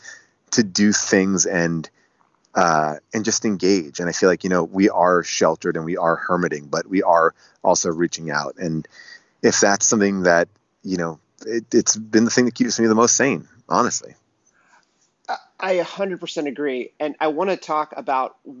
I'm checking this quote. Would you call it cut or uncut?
uncut